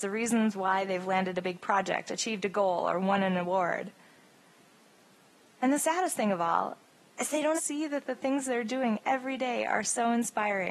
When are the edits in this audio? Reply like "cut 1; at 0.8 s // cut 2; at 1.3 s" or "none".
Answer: cut 1; at 7.5 s